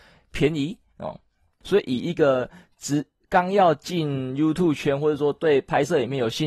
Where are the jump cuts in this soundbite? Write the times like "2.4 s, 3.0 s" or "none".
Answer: 1.6 s